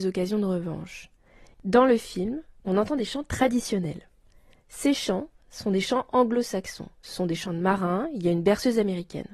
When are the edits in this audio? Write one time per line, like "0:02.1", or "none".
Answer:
0:01.5

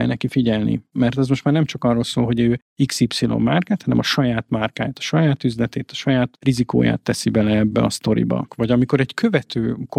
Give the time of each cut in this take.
0:08.5

